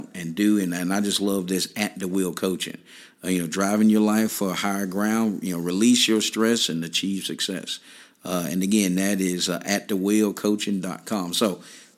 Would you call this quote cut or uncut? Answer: uncut